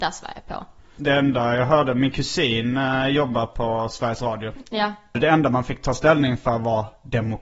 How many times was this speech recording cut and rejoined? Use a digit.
0